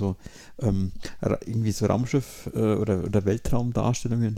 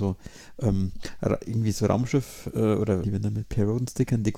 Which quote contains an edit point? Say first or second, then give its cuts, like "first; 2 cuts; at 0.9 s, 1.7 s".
second; 1 cut; at 3.0 s